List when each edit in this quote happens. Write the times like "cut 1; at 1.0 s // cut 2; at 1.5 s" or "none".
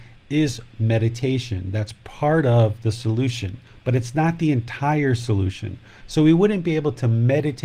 none